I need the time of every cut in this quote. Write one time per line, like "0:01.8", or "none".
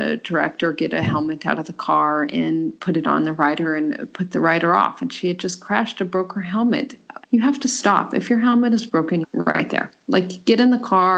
0:07.2
0:09.2